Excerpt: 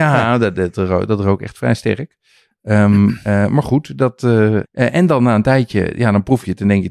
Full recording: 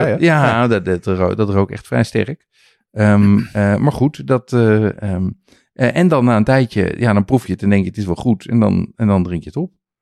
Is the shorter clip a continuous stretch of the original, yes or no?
no